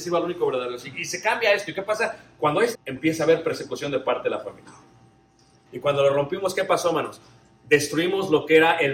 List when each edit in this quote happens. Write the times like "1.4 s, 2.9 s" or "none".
2.7 s, 5.7 s